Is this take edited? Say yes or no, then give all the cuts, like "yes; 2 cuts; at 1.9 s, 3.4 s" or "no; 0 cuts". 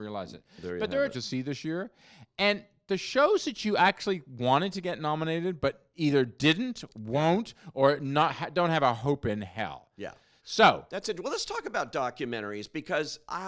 yes; 1 cut; at 1.1 s